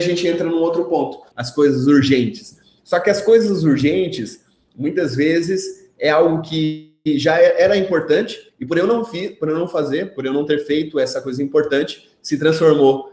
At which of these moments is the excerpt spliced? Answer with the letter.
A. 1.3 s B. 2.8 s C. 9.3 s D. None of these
A